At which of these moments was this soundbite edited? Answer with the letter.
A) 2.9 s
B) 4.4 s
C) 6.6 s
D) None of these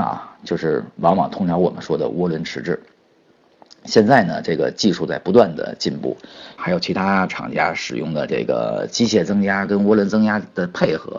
C